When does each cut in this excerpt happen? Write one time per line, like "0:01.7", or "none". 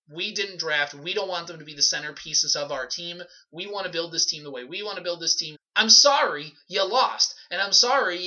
0:05.5